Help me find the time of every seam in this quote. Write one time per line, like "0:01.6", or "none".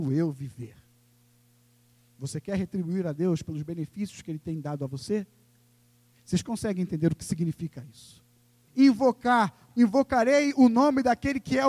0:06.1
0:08.7
0:09.7

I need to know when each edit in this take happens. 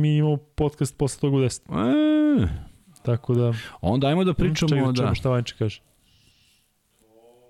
none

